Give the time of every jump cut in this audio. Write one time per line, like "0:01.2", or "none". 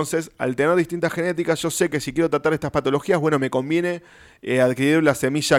none

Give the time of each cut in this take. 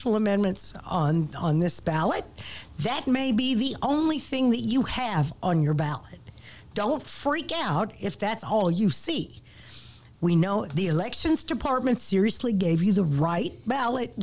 0:10.1

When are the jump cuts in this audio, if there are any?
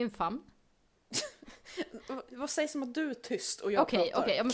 none

